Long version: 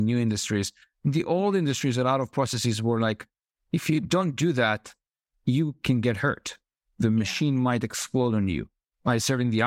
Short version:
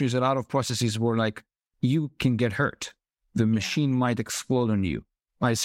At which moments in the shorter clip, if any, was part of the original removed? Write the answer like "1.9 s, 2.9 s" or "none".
1.7 s